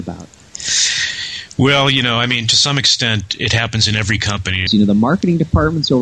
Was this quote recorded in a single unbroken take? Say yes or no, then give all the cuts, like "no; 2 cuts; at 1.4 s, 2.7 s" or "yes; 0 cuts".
no; 1 cut; at 4.7 s